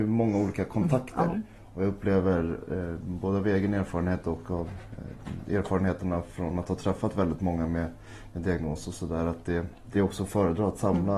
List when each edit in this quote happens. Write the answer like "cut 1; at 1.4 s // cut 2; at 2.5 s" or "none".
none